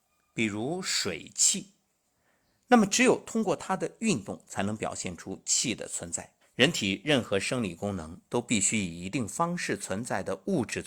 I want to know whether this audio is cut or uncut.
cut